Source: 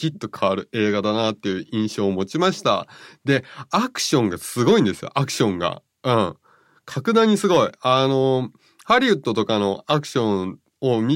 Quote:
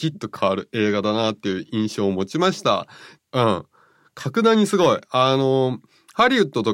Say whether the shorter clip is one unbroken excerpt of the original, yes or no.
no